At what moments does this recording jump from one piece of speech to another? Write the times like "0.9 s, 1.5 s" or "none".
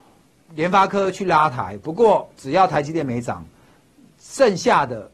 none